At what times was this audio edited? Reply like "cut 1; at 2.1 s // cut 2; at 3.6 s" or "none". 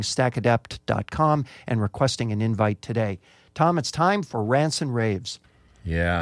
none